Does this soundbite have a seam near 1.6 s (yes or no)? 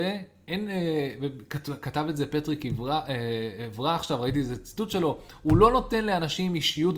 no